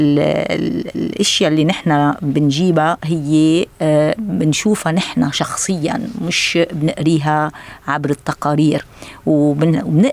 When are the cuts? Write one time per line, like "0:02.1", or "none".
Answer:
none